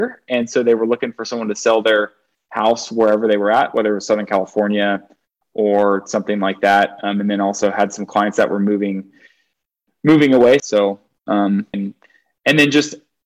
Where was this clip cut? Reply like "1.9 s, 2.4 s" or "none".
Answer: 10.6 s, 11.7 s